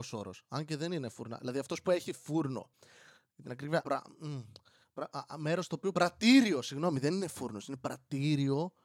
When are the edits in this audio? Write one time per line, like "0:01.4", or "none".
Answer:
none